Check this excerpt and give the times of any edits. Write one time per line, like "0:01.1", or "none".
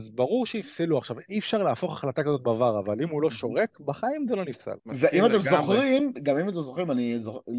0:04.8